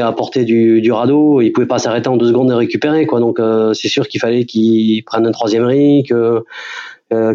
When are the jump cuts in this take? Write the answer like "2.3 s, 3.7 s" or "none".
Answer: none